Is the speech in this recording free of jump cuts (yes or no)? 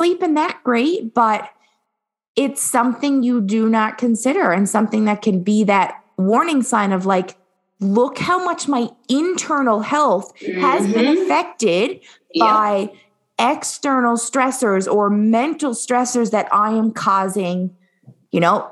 yes